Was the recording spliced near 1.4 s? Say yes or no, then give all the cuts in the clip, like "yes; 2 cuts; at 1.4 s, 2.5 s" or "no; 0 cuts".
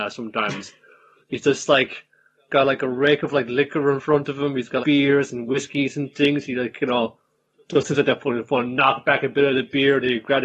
no; 1 cut; at 4.8 s